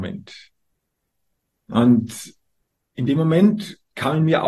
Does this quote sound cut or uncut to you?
uncut